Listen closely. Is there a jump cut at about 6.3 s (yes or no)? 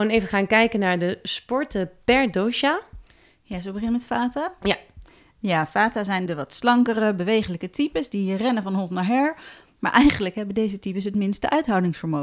yes